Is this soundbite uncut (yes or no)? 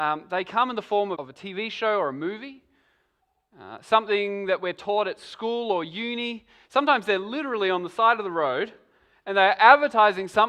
no